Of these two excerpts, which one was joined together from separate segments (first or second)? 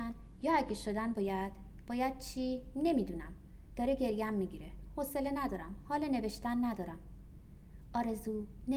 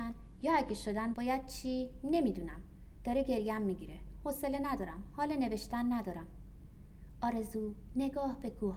second